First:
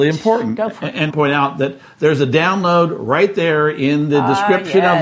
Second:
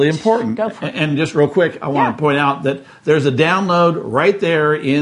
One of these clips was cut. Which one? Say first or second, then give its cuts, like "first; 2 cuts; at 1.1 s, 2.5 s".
first; 1 cut; at 1.1 s